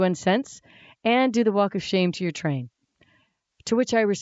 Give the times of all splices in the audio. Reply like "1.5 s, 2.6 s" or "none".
none